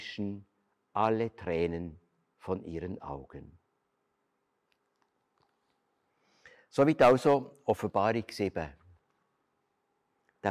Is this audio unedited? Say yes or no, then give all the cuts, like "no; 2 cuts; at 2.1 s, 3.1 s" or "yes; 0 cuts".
yes; 0 cuts